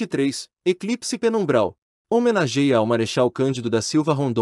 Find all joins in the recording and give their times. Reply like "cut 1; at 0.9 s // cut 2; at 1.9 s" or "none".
cut 1; at 2.0 s

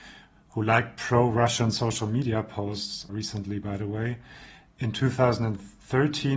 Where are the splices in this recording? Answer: cut 1; at 3.1 s

